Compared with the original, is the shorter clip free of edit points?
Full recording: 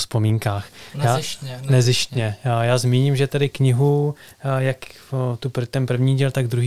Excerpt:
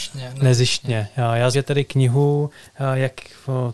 no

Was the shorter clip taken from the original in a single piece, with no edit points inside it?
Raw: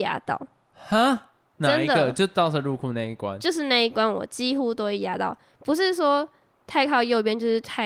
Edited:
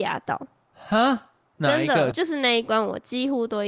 no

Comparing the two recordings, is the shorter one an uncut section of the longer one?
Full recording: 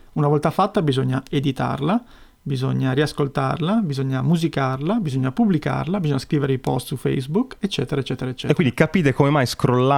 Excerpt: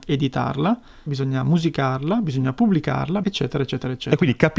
no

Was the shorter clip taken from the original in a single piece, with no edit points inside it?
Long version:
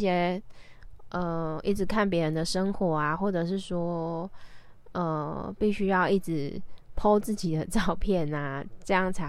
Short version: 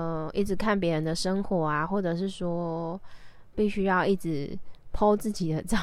no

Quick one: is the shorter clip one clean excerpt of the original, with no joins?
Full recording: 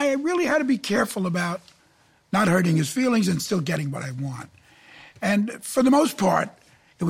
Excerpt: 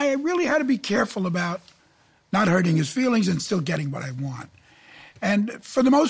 yes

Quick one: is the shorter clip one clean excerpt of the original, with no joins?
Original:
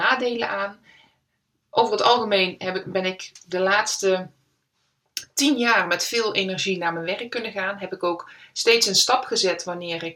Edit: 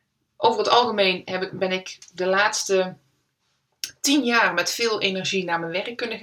yes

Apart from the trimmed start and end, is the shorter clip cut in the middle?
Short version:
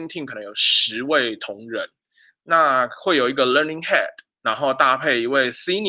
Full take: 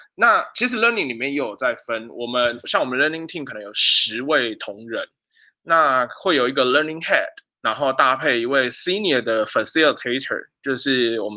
no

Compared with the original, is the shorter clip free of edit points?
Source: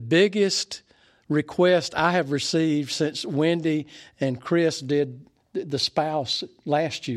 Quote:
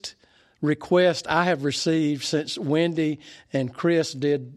yes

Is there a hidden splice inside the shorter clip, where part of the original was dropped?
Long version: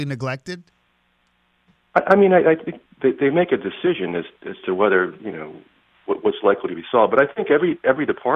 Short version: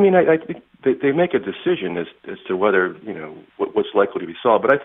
yes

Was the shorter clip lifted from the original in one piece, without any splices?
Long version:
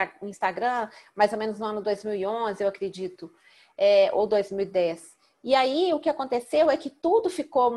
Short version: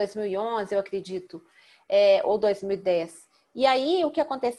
yes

